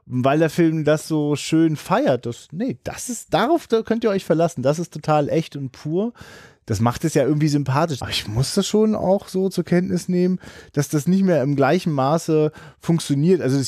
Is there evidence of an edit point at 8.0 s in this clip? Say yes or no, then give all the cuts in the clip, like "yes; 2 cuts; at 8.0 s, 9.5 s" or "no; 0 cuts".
yes; 1 cut; at 8.0 s